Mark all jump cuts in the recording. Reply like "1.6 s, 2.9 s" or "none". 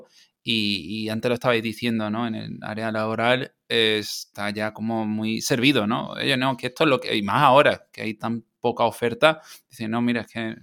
none